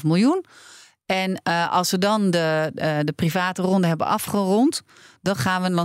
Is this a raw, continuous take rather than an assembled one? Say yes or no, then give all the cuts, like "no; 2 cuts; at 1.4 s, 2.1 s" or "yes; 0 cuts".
yes; 0 cuts